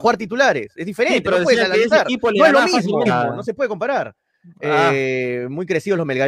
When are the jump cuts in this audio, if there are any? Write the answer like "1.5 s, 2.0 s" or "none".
3.1 s

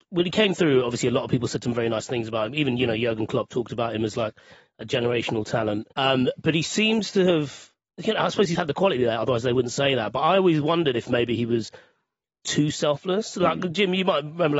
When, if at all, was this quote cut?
5.9 s, 8.5 s

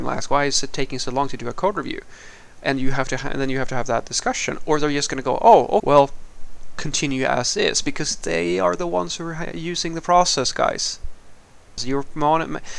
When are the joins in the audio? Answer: 5.8 s, 11.8 s

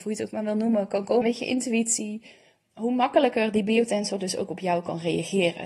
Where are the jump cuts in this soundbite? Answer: 1.2 s

